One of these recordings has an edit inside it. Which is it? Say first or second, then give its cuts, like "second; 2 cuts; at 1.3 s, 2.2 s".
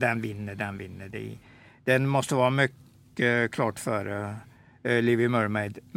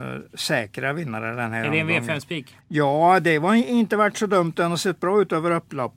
second; 1 cut; at 2.6 s